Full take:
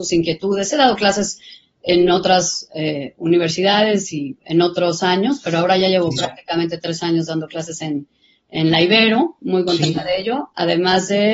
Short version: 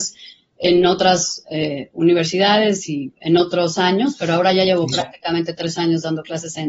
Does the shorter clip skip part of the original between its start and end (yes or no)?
no